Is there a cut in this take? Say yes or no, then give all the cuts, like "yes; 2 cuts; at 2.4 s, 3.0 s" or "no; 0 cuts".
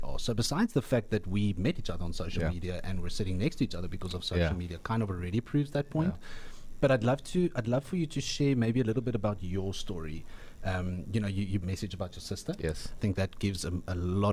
yes; 2 cuts; at 11.6 s, 13.0 s